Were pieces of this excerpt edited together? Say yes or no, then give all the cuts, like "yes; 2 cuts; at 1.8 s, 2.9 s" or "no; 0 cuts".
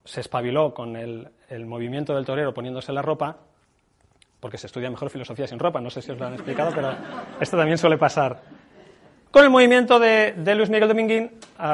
no; 0 cuts